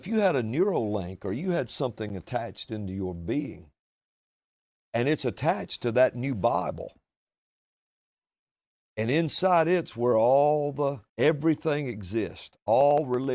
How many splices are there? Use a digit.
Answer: 1